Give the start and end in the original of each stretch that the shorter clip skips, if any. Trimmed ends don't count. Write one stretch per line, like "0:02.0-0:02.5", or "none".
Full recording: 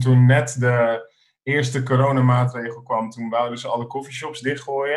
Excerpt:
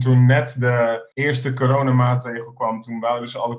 0:01.1-0:01.4